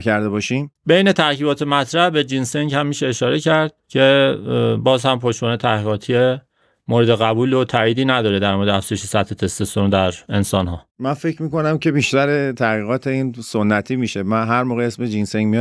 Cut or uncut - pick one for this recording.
uncut